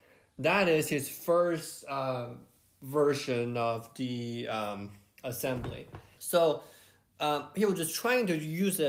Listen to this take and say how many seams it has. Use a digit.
1